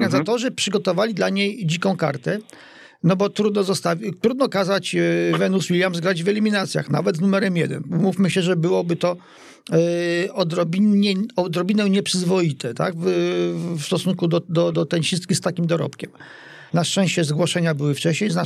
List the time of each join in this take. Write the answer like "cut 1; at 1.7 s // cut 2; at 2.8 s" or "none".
cut 1; at 14.7 s // cut 2; at 16.7 s